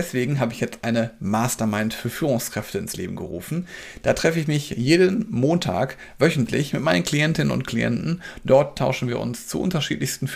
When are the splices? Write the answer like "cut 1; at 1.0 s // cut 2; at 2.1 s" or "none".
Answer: none